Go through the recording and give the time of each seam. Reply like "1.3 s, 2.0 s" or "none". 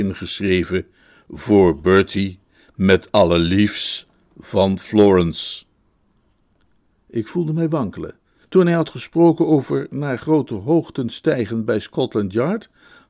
8.4 s